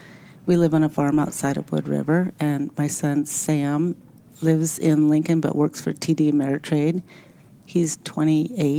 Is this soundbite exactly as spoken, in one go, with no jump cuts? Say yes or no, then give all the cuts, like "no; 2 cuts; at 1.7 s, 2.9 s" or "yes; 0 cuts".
yes; 0 cuts